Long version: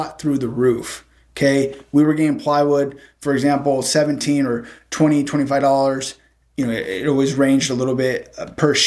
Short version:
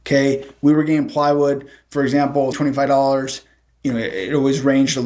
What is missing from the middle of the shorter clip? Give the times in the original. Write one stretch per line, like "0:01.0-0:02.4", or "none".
0:03.8-0:05.3